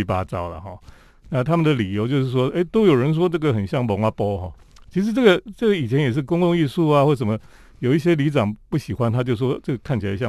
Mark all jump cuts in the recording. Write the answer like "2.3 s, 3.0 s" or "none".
none

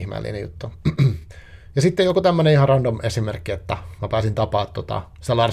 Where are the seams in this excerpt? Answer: none

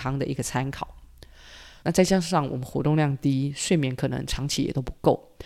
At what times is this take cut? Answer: 1.8 s

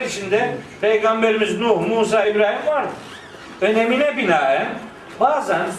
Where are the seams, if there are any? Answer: 2.2 s

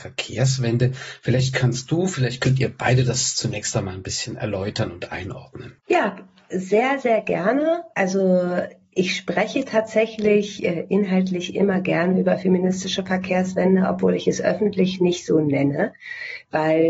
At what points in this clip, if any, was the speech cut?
5.8 s

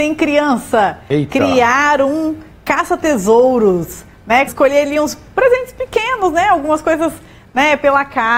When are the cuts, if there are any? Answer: 4.5 s

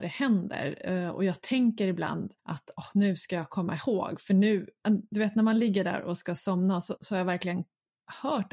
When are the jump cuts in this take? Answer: 2.4 s, 7.0 s

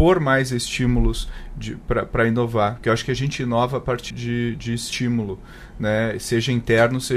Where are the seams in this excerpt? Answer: 4.1 s

